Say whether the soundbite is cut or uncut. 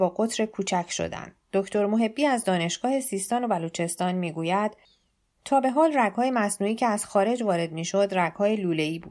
uncut